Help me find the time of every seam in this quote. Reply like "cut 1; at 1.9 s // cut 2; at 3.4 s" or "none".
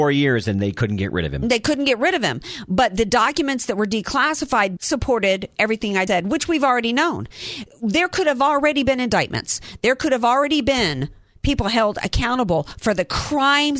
cut 1; at 4.8 s // cut 2; at 6.1 s